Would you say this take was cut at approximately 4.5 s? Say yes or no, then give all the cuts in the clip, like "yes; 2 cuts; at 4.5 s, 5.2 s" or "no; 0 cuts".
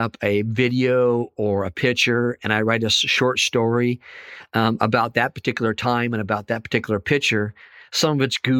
no; 0 cuts